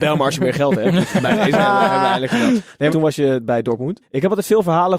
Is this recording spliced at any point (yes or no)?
yes